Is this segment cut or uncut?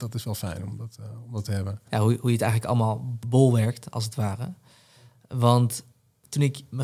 cut